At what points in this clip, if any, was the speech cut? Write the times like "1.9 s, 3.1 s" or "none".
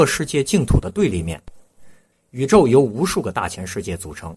2.1 s